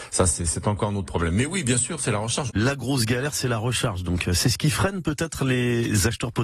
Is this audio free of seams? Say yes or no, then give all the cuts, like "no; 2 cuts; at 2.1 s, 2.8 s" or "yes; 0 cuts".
no; 1 cut; at 2.5 s